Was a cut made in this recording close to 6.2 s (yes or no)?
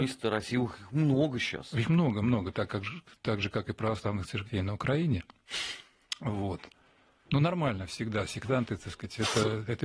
no